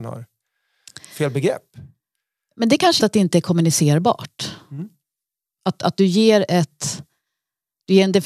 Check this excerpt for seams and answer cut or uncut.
cut